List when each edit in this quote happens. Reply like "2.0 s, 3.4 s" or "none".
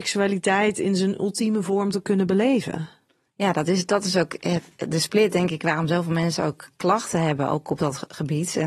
none